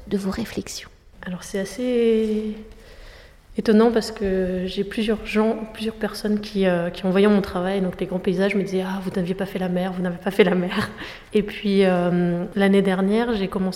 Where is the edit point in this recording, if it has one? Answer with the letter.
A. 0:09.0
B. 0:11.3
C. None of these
B